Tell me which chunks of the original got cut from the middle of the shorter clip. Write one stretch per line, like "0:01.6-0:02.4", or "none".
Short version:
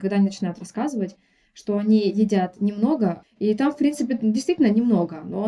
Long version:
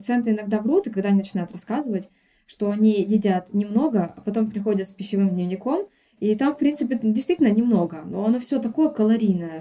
0:04.1-0:06.0